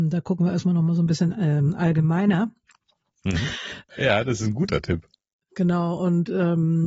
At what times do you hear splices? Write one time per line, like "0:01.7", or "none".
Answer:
0:03.9